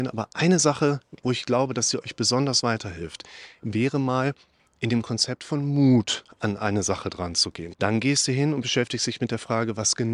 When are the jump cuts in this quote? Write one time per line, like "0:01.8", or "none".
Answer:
0:07.7